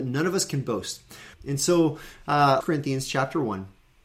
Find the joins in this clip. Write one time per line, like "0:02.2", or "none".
0:01.3
0:02.6